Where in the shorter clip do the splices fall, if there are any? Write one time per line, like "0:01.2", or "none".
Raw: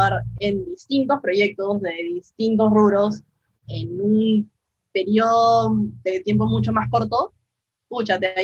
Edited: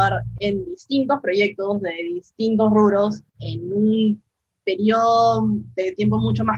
0:03.3

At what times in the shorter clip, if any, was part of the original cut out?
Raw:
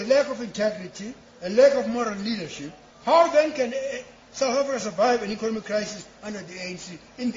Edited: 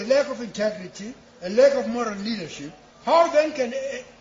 none

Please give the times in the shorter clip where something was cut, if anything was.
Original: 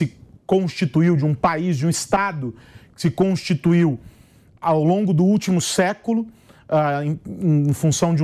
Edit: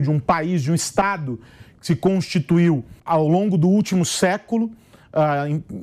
0:03.0

